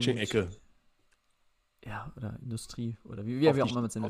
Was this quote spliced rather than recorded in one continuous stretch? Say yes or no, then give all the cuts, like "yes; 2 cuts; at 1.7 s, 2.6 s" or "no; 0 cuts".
no; 0 cuts